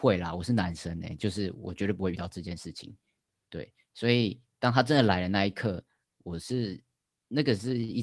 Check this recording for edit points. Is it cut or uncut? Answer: uncut